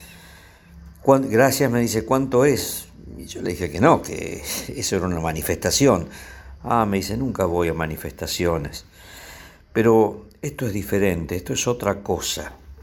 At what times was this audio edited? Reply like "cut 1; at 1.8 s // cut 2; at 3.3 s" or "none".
none